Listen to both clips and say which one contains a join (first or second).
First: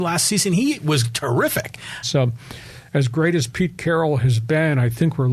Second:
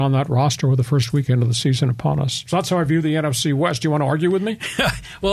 first